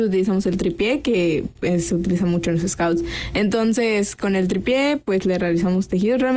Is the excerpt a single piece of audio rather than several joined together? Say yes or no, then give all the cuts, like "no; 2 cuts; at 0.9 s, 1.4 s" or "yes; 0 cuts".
yes; 0 cuts